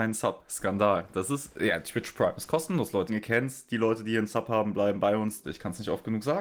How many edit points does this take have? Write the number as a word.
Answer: two